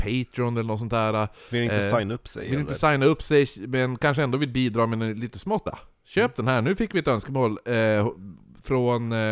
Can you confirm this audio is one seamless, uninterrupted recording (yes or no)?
no